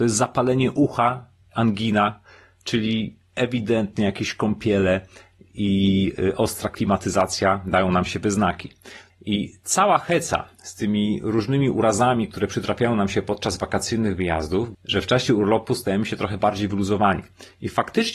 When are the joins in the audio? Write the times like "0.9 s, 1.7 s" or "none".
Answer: 9.1 s, 14.7 s